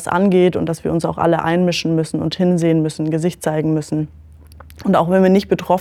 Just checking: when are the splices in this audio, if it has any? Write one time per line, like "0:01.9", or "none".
none